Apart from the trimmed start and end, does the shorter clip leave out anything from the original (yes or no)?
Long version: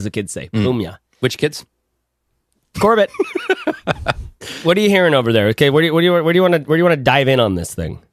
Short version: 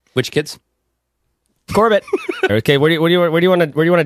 yes